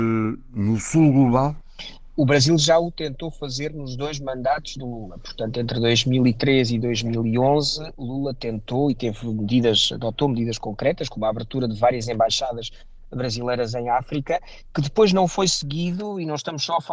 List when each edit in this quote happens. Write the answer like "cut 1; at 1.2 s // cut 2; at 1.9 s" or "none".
none

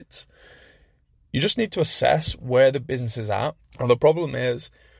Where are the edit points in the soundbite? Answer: cut 1; at 3.6 s

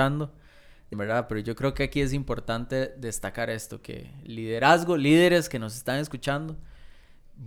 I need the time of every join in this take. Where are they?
cut 1; at 0.9 s

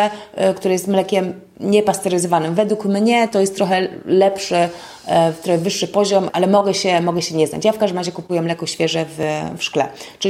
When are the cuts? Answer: cut 1; at 6.3 s

